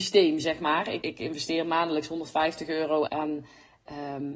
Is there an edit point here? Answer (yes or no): yes